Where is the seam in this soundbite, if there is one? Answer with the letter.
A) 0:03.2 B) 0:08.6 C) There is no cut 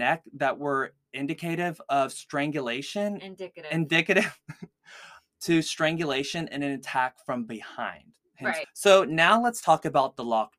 B